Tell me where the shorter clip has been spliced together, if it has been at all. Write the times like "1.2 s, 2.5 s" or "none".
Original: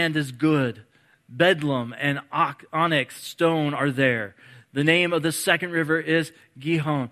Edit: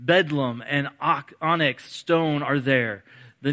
none